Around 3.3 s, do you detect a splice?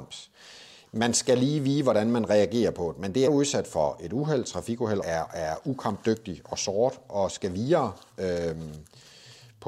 yes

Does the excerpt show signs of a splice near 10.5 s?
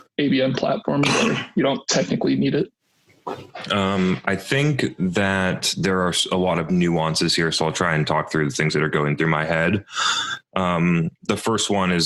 no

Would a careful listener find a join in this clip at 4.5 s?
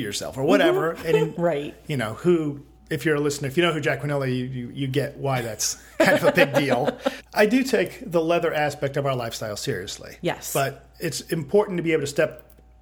no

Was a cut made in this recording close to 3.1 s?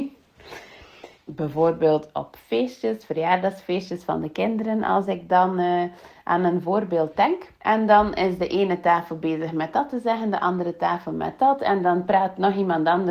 no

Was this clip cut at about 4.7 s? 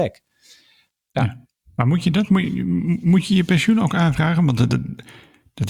no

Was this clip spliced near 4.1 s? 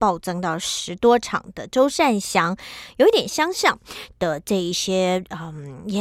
yes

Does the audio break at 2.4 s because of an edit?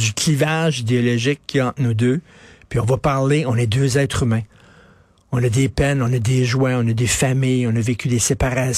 no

